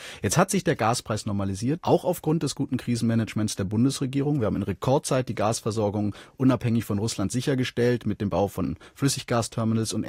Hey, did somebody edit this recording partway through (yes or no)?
yes